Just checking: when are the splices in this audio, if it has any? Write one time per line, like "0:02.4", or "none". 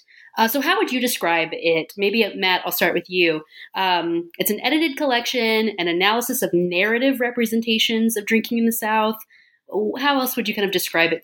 none